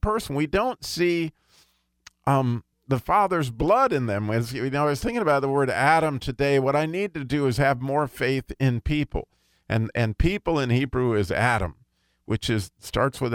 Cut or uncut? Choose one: uncut